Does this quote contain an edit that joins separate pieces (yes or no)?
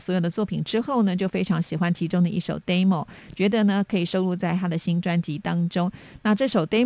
no